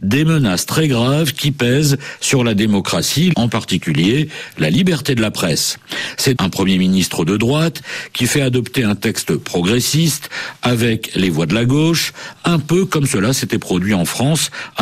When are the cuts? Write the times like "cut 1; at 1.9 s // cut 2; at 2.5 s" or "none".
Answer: cut 1; at 3.3 s // cut 2; at 6.3 s

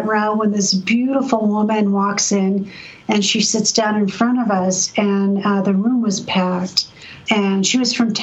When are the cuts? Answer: cut 1; at 7.3 s

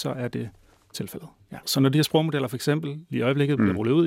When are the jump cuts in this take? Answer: cut 1; at 1.6 s

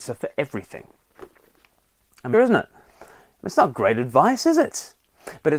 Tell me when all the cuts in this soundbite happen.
cut 1; at 2.3 s

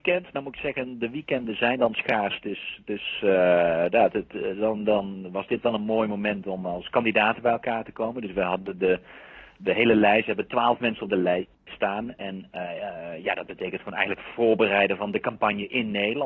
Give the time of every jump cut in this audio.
none

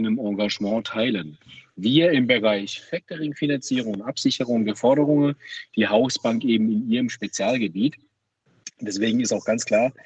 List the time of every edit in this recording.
none

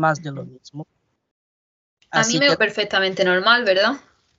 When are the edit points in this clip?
cut 1; at 2.6 s

